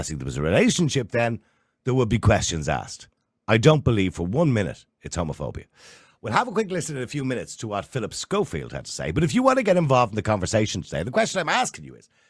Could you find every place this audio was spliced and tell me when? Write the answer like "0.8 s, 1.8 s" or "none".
none